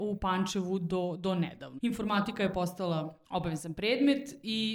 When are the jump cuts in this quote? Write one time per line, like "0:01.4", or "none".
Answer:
0:01.8
0:03.2